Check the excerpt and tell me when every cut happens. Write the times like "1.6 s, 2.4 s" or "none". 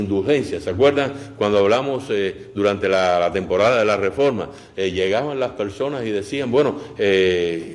none